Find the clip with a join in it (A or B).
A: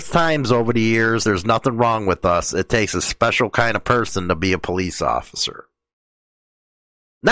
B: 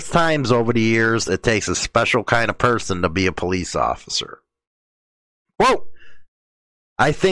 B